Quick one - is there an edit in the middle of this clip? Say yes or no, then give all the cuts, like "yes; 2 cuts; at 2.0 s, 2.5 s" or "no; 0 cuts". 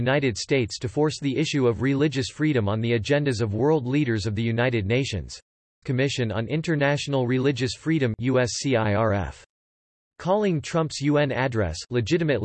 yes; 1 cut; at 5.8 s